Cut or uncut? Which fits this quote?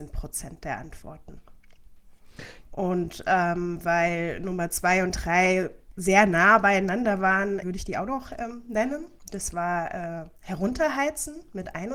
cut